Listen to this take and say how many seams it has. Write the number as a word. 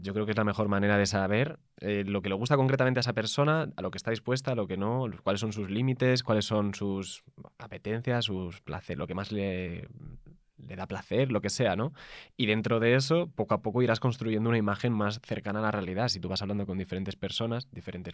zero